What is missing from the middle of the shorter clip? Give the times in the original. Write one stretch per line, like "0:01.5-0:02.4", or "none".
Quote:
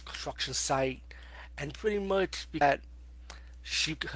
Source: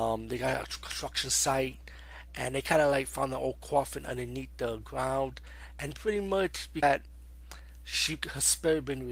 0:02.3-0:05.7

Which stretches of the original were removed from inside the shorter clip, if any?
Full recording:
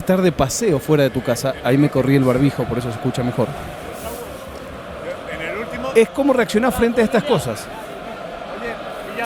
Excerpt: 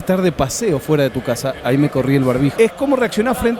0:02.6-0:05.9

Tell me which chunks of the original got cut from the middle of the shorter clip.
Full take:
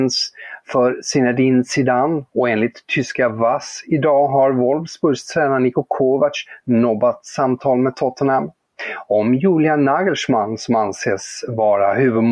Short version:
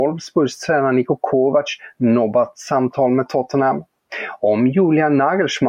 none

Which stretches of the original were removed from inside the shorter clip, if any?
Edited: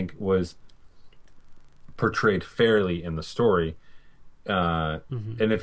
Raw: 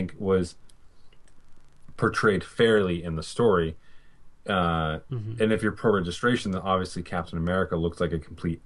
none

